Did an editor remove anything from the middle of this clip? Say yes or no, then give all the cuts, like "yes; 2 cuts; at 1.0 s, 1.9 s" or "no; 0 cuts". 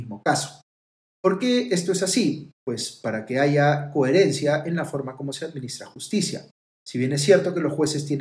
no; 0 cuts